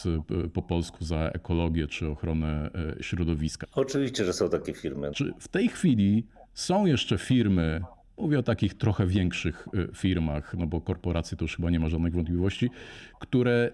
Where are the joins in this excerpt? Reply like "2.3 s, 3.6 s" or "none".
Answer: 3.6 s, 5.1 s